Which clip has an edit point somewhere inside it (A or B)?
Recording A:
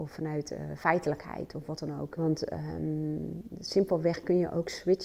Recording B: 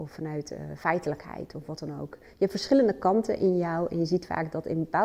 A